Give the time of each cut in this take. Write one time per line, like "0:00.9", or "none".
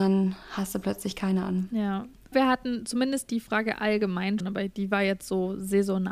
0:02.3
0:04.4